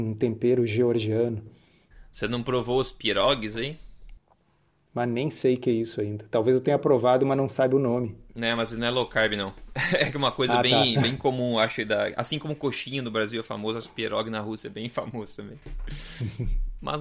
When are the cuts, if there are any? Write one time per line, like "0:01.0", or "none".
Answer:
none